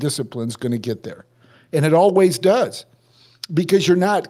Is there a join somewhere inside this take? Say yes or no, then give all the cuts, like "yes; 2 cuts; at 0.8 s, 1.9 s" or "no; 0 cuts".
no; 0 cuts